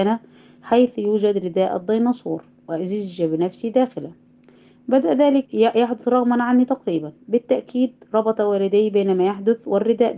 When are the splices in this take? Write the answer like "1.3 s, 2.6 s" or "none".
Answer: 5.5 s, 7.2 s